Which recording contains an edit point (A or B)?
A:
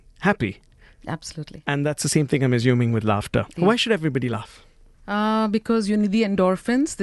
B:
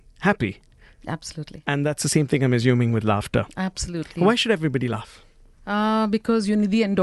A